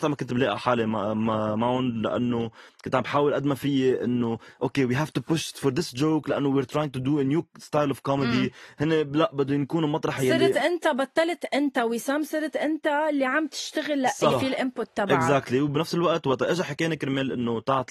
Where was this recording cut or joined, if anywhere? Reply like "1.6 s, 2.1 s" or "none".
14.3 s